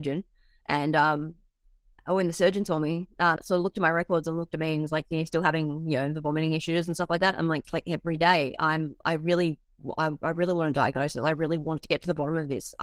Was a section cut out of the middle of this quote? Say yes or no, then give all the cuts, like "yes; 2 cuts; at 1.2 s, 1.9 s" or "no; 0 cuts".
yes; 2 cuts; at 3.4 s, 7.6 s